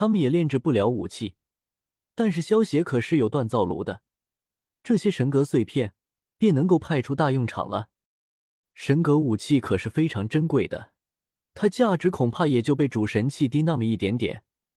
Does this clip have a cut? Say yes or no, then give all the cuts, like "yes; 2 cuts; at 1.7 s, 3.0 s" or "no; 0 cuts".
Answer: no; 0 cuts